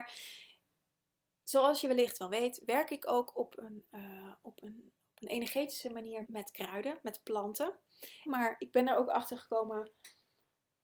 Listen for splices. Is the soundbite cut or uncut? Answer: cut